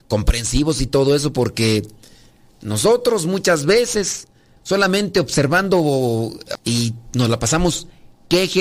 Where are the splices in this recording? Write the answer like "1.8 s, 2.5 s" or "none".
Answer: 4.6 s, 6.6 s